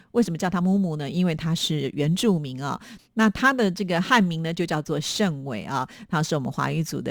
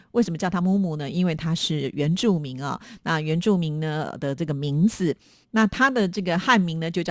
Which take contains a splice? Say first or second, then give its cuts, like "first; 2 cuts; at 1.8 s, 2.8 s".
first; 1 cut; at 3.0 s